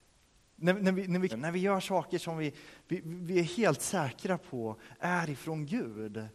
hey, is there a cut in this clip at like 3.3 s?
no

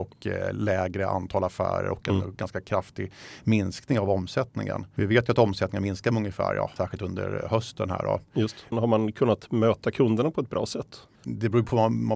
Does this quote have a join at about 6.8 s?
yes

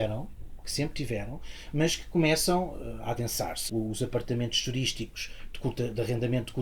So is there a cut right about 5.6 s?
no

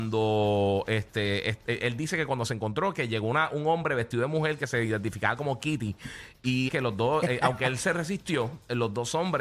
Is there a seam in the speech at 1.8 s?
no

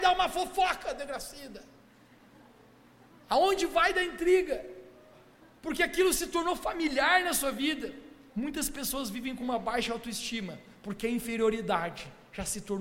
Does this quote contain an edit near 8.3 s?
yes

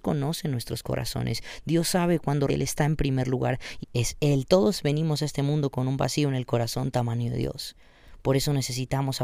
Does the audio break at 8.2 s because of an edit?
no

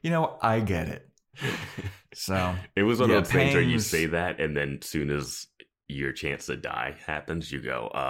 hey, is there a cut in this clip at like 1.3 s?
yes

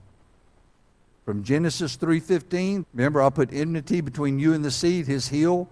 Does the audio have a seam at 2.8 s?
yes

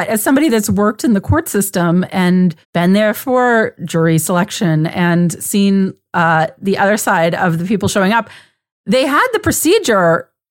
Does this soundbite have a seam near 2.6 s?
yes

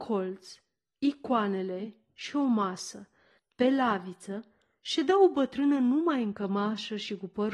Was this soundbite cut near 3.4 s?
yes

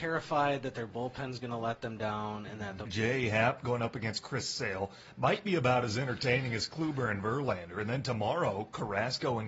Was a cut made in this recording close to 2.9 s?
yes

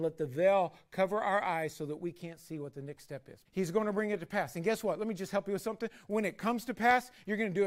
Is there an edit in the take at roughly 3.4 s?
yes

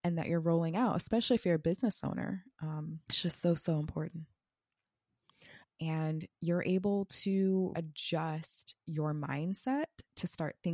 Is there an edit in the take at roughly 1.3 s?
no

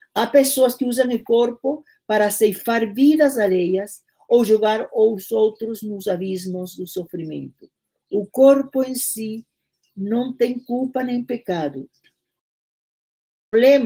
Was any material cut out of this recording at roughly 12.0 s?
yes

